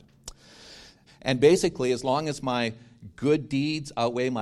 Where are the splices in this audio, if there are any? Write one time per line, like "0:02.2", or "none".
0:01.1